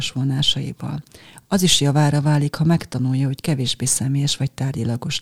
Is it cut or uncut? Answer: uncut